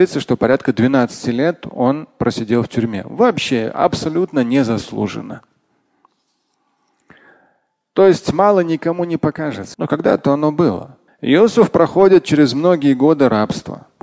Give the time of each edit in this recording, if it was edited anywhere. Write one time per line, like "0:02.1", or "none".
0:09.7
0:11.1